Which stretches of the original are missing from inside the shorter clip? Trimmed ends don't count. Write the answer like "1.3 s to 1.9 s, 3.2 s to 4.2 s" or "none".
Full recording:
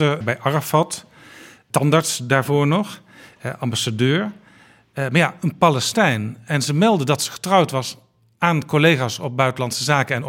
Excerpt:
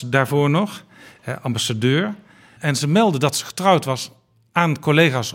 4.7 s to 6.4 s